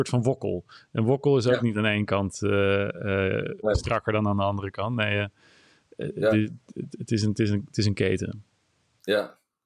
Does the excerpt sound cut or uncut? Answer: uncut